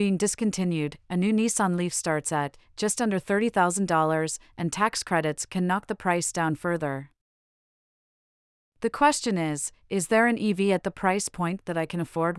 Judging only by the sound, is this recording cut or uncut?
cut